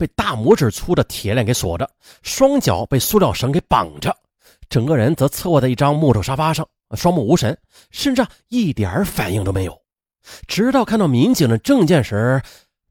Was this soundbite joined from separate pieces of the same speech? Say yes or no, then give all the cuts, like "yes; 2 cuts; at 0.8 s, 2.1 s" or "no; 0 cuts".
yes; 1 cut; at 8.4 s